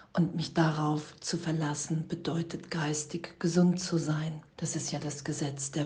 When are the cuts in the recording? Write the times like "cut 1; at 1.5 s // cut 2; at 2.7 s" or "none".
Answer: cut 1; at 4.5 s